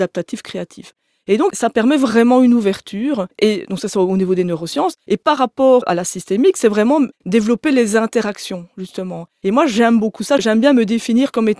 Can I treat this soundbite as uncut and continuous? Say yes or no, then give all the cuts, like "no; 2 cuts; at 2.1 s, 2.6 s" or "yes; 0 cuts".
yes; 0 cuts